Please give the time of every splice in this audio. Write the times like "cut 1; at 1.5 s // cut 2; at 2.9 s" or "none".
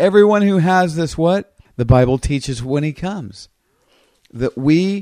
cut 1; at 1.7 s